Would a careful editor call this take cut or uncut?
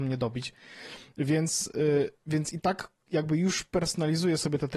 uncut